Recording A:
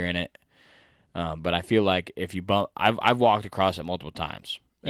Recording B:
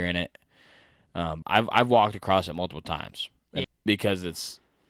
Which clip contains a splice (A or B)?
B